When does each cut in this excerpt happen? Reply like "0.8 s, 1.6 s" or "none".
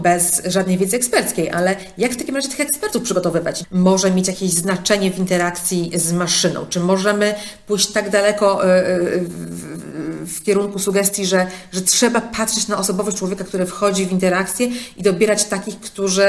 3.6 s